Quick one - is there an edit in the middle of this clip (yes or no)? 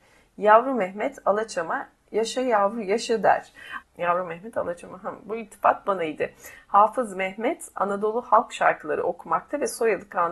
yes